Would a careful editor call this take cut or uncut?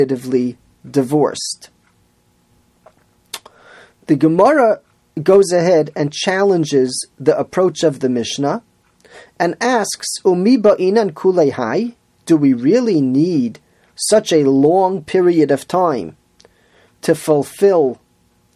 uncut